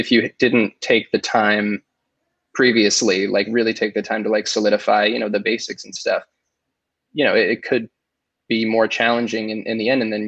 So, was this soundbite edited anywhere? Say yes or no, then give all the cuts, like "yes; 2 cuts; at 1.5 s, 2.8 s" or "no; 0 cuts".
no; 0 cuts